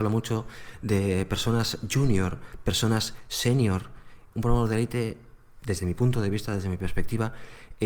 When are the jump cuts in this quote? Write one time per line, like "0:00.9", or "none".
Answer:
0:04.3